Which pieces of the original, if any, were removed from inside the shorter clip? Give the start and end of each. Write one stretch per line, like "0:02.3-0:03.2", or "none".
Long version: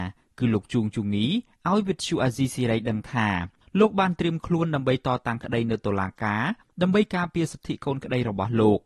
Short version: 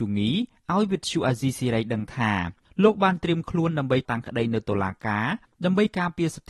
0:05.0-0:05.2